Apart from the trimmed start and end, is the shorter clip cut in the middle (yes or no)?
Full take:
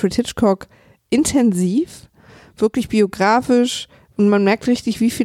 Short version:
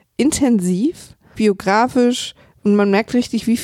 yes